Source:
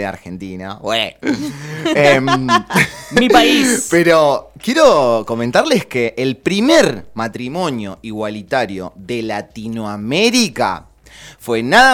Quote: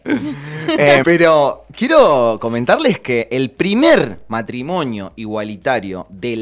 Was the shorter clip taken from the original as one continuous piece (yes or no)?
no